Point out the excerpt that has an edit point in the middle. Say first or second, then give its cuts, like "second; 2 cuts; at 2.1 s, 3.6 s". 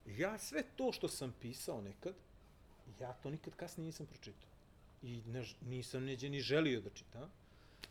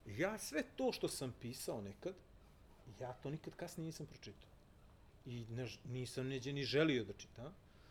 first; 1 cut; at 4.9 s